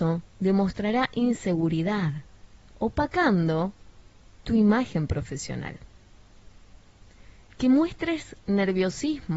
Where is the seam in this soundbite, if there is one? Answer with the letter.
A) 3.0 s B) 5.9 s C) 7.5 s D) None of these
C